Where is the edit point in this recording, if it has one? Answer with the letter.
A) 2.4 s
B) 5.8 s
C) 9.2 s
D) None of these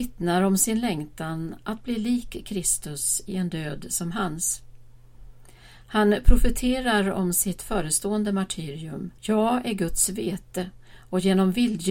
C